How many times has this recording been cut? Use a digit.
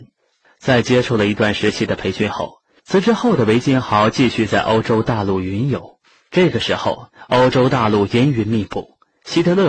1